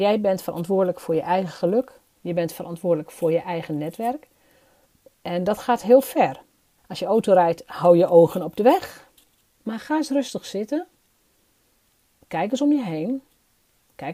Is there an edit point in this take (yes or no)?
yes